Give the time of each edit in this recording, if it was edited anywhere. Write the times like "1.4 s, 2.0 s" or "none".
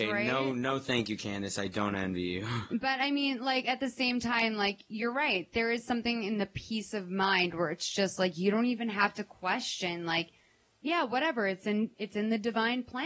none